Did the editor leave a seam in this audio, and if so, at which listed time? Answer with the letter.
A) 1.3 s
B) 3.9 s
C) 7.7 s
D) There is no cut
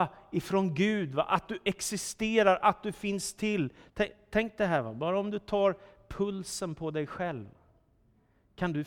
B